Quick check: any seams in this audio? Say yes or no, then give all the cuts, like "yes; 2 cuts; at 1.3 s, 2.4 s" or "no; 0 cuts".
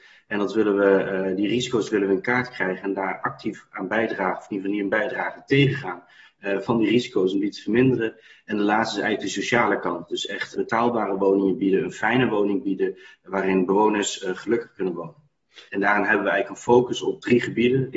yes; 2 cuts; at 10.6 s, 15.7 s